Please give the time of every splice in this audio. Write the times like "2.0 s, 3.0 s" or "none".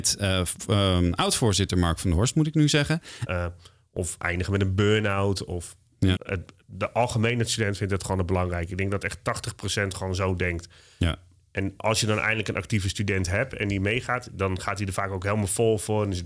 3.3 s, 6.2 s